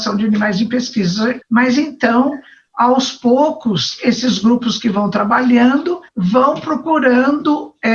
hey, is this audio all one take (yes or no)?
no